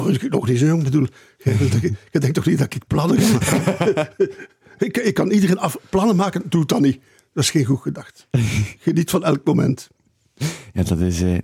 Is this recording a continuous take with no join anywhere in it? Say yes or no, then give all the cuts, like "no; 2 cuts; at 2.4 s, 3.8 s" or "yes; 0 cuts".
yes; 0 cuts